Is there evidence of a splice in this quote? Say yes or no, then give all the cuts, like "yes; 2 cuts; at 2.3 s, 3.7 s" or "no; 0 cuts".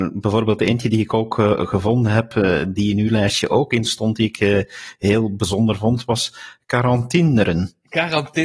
yes; 1 cut; at 2.8 s